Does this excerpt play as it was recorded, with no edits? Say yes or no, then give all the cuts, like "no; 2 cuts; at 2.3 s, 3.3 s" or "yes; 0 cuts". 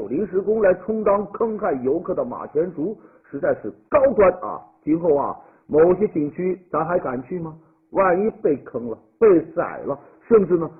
yes; 0 cuts